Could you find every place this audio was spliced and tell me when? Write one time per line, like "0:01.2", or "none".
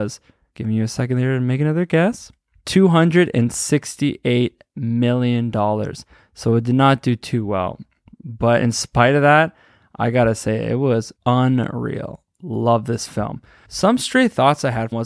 0:11.2